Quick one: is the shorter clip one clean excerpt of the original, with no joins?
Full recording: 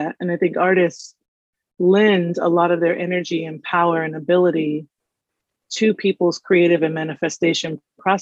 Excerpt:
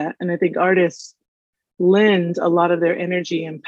yes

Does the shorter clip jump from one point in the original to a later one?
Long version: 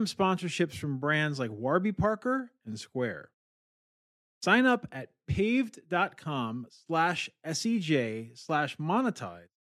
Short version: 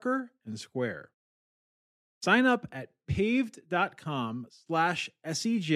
no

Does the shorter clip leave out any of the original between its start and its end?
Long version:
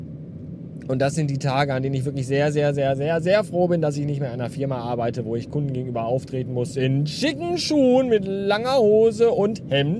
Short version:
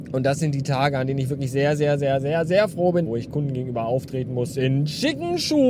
yes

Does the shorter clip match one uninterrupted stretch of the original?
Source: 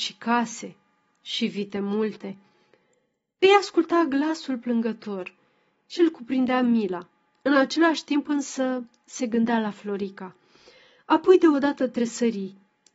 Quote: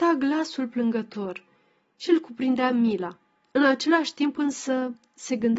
yes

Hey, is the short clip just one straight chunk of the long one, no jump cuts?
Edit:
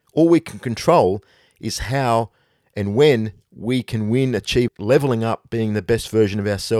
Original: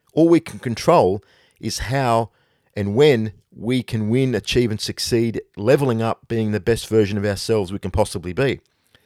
no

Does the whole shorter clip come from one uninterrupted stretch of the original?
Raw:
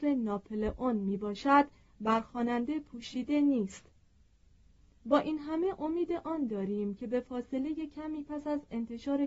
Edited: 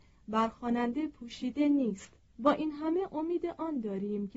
no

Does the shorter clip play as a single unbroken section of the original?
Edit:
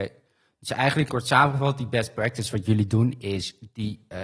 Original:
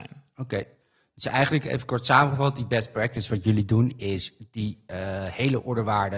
no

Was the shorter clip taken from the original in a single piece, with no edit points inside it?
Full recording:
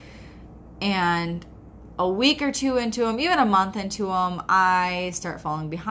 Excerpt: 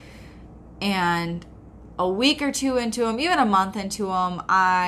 yes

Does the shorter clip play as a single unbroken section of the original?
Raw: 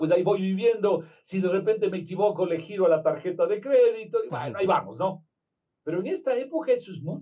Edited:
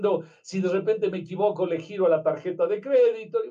yes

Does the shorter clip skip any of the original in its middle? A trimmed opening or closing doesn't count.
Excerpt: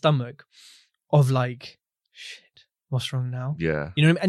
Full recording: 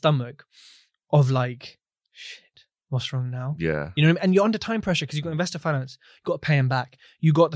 no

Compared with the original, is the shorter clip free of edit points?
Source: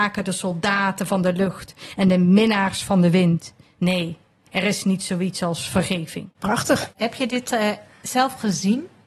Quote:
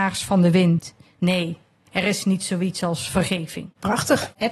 yes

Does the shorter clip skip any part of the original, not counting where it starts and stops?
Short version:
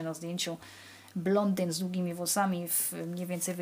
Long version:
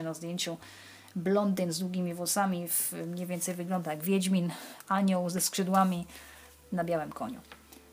no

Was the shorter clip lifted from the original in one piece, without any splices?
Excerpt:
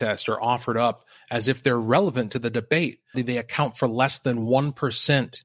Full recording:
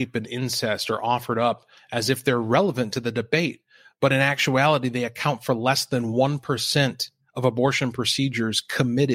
no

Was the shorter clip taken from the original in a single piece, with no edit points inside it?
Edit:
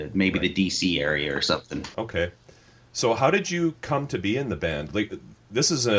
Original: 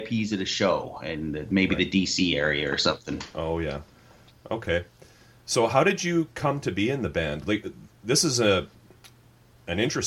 no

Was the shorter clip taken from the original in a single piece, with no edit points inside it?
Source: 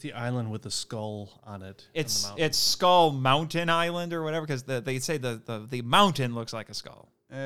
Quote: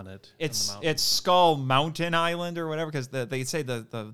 yes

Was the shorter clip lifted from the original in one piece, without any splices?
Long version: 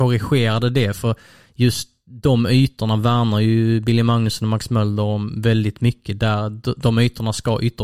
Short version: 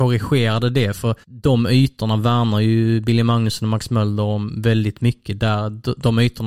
no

